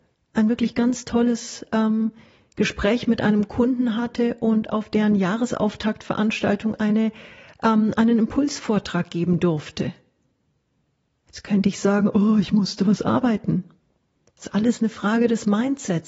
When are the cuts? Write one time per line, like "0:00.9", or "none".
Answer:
none

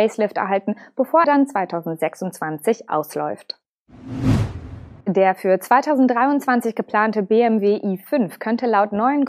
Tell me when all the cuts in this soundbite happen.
0:01.2
0:05.0

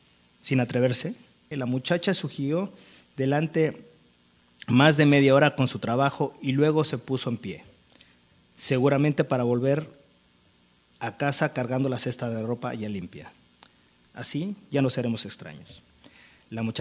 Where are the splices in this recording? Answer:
0:01.5
0:14.0

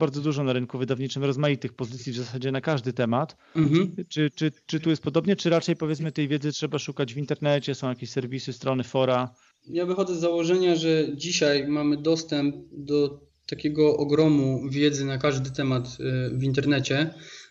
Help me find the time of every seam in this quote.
none

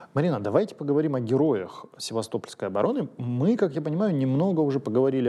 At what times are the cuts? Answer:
none

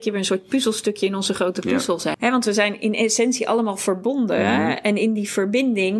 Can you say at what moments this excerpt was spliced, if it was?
0:02.1

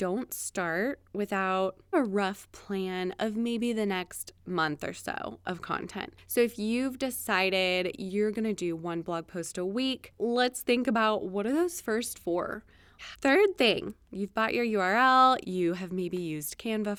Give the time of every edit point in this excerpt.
0:10.2
0:13.1
0:15.4

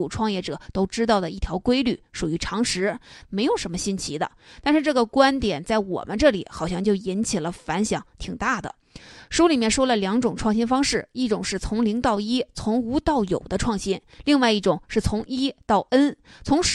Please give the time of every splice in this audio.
0:03.2

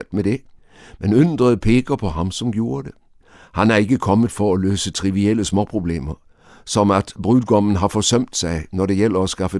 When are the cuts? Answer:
none

